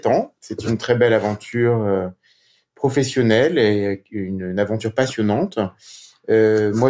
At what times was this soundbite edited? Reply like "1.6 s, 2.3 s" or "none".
none